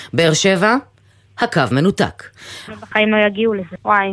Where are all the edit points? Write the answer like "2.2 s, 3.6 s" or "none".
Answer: 2.7 s